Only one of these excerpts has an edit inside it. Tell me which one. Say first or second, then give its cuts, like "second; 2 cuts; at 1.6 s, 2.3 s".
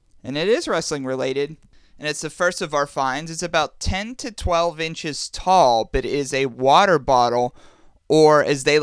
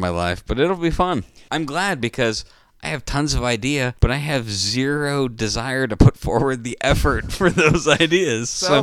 second; 2 cuts; at 1.5 s, 4.0 s